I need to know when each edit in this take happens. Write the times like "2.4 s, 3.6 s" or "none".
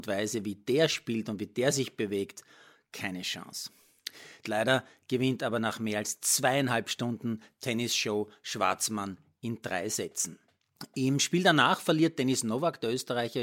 4.4 s